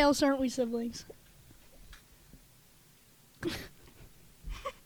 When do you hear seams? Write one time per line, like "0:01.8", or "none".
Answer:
0:02.0